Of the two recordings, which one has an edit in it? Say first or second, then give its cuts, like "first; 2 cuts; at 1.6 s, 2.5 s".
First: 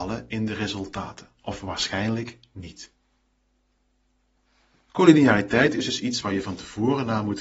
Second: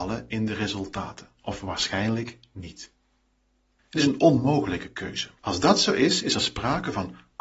second; 2 cuts; at 3.8 s, 5.4 s